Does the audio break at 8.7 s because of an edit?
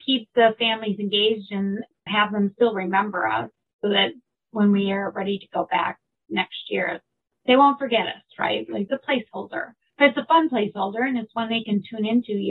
no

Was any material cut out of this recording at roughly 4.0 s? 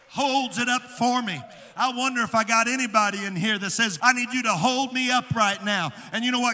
yes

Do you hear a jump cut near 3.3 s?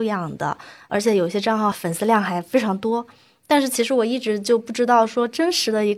no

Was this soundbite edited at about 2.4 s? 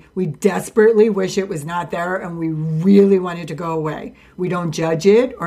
no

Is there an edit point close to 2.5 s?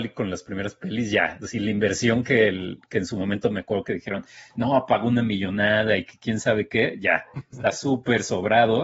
no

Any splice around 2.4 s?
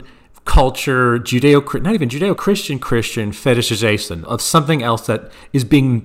yes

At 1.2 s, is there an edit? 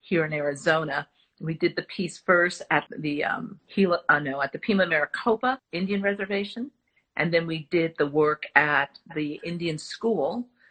no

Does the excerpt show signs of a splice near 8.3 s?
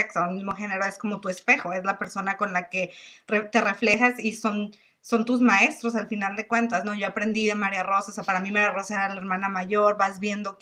no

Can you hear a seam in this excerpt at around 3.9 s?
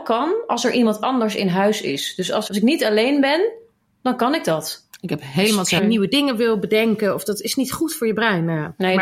no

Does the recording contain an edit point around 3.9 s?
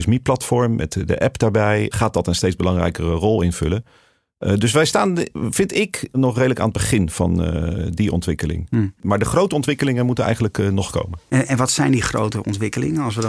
no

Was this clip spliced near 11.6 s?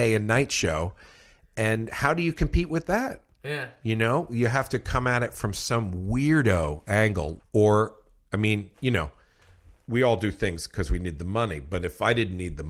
no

